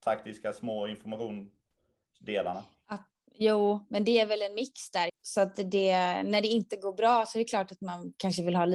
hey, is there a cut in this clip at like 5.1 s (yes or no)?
yes